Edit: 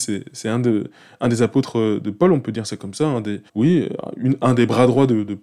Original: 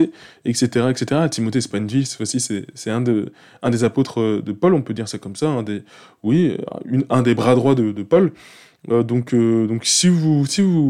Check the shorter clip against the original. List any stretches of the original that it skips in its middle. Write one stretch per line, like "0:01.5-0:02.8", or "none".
0:05.9-0:06.2